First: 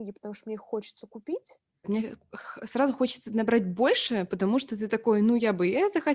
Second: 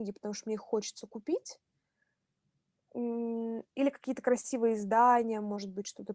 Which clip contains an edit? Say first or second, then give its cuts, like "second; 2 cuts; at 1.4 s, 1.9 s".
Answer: first; 1 cut; at 1.8 s